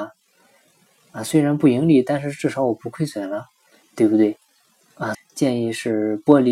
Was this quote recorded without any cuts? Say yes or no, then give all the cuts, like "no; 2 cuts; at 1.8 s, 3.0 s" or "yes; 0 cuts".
no; 2 cuts; at 3.8 s, 5.1 s